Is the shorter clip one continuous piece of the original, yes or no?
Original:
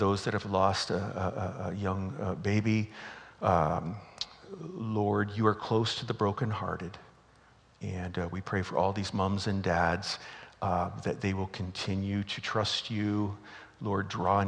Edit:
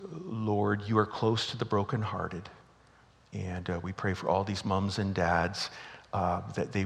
yes